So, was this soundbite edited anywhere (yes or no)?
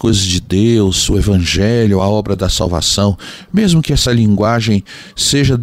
no